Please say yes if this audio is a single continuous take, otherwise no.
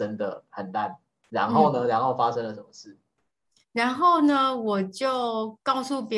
yes